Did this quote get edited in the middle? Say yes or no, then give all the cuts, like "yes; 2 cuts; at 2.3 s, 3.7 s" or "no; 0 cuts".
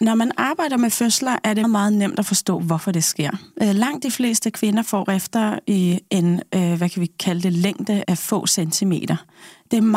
yes; 2 cuts; at 1.6 s, 8.0 s